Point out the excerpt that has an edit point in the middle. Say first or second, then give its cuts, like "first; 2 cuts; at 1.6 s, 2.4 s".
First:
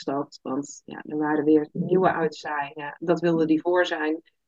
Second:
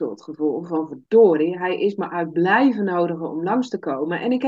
first; 1 cut; at 3.0 s